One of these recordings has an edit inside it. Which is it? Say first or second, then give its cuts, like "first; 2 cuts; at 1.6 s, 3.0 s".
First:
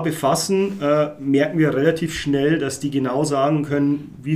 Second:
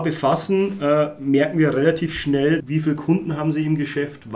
second; 1 cut; at 2.6 s